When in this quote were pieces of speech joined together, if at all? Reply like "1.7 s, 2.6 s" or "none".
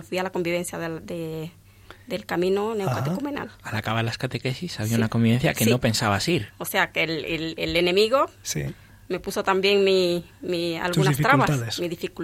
6.5 s